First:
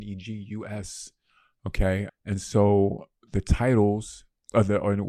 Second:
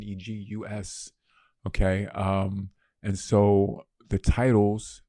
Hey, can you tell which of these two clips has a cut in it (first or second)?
first